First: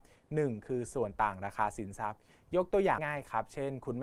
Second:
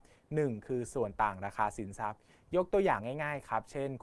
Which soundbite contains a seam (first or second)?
first